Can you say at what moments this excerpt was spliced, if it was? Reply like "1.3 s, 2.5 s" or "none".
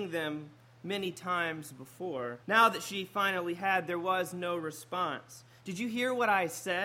2.4 s